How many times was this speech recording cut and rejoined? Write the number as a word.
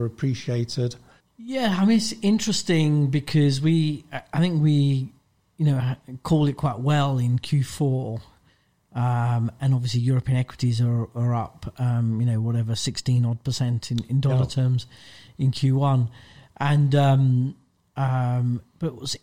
one